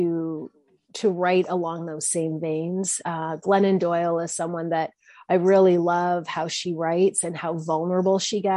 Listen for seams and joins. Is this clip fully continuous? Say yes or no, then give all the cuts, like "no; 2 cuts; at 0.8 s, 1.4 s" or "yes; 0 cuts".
yes; 0 cuts